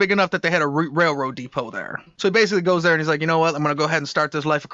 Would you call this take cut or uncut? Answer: uncut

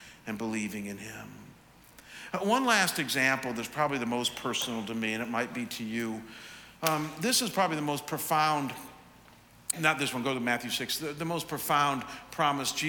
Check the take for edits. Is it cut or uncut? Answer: cut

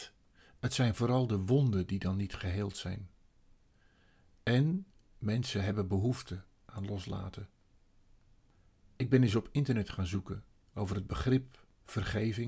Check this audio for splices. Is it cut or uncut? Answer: uncut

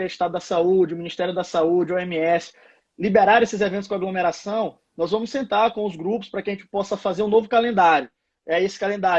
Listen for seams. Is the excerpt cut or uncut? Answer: uncut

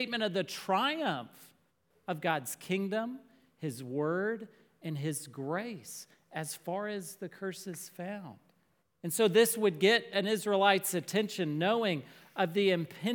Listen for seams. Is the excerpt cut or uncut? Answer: uncut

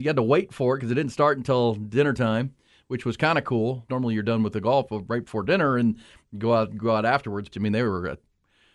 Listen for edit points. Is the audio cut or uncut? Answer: cut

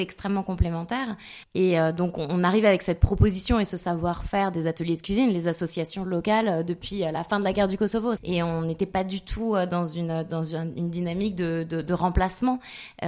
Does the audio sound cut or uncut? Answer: cut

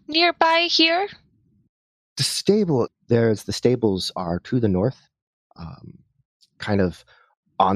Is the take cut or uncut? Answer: cut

